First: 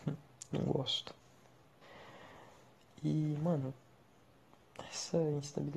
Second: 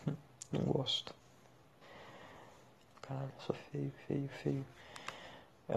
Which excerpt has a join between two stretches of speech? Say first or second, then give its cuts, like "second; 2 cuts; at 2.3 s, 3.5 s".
second; 2 cuts; at 2.9 s, 4.3 s